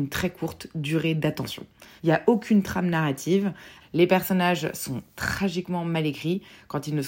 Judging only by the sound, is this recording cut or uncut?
cut